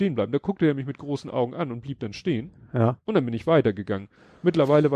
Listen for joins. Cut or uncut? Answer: uncut